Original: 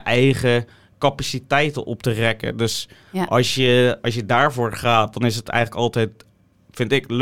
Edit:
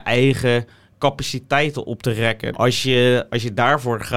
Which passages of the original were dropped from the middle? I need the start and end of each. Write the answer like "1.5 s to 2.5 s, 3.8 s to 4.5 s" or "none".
2.5 s to 3.3 s